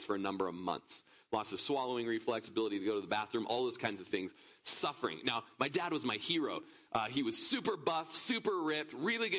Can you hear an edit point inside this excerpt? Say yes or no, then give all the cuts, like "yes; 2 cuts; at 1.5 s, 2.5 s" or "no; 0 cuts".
no; 0 cuts